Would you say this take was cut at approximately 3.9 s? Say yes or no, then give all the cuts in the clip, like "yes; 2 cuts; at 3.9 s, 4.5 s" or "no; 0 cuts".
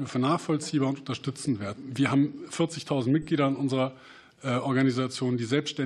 no; 1 cut; at 1.8 s